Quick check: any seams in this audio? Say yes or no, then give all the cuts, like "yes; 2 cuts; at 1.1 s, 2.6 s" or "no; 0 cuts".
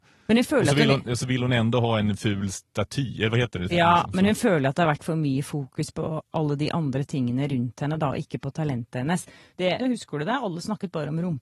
yes; 2 cuts; at 3.7 s, 9.8 s